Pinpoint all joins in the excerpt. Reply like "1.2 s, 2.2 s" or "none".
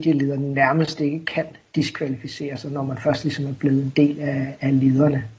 none